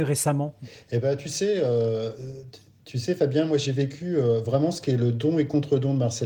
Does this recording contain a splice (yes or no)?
no